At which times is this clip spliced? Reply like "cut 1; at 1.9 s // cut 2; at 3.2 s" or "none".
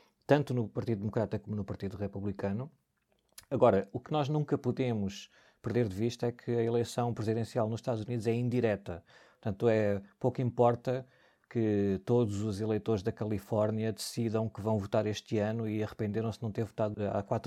none